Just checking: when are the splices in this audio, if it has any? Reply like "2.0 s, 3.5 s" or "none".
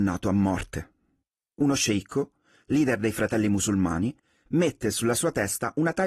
none